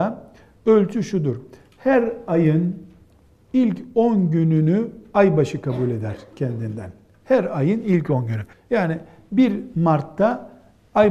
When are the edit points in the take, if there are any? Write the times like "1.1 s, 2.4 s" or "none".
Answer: 8.5 s